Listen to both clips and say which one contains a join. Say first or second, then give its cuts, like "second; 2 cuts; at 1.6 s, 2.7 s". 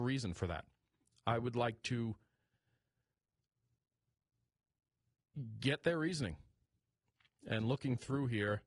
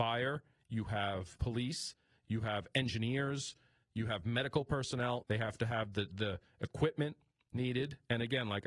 second; 1 cut; at 5.2 s